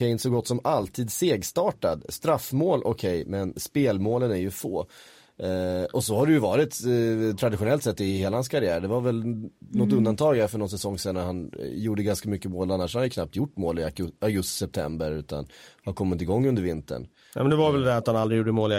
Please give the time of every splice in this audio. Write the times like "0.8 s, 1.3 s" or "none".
none